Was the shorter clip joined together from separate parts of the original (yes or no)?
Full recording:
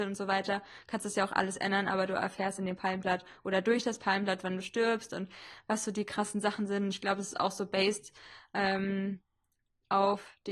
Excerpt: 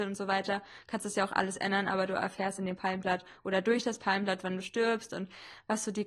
no